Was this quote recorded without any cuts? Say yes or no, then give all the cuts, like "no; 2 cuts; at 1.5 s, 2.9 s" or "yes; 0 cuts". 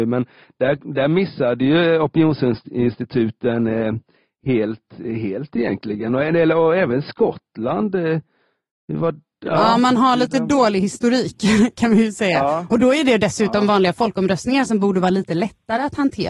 yes; 0 cuts